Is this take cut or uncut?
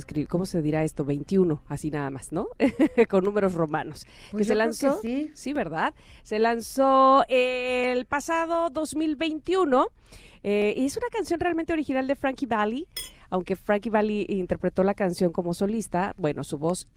uncut